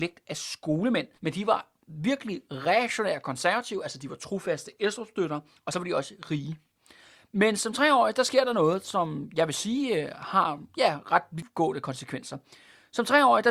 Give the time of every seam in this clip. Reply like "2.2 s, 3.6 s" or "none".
1.2 s